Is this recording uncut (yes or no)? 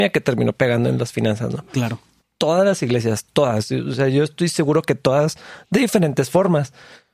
yes